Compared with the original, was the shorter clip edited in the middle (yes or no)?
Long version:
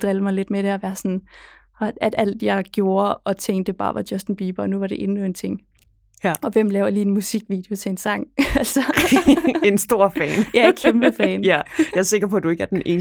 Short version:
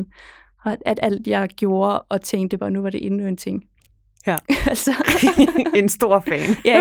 yes